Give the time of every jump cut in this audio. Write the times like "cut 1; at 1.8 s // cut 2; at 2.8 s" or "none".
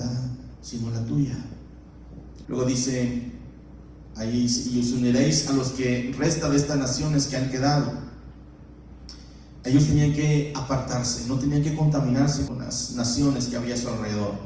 cut 1; at 2.4 s // cut 2; at 9.6 s // cut 3; at 12.5 s